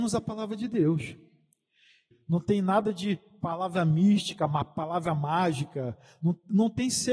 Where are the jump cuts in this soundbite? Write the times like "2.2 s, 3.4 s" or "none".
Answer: 2.1 s